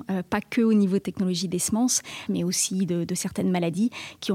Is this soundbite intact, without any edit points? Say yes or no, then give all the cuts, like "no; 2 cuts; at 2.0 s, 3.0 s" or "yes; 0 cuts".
no; 1 cut; at 2.3 s